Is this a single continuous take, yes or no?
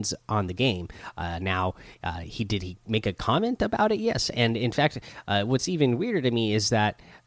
yes